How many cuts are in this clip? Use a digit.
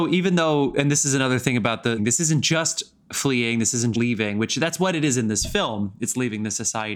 2